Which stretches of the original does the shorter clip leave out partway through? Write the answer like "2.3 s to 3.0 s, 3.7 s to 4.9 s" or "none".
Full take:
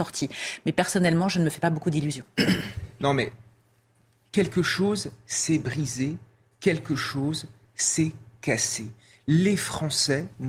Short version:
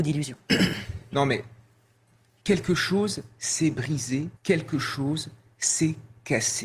6.2 s to 6.5 s